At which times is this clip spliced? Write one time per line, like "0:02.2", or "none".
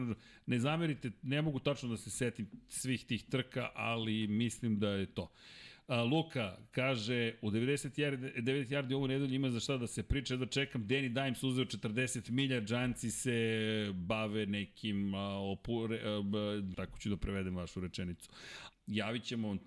0:16.7
0:18.7